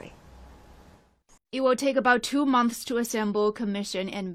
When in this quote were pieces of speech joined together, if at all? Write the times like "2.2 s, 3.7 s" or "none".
1.4 s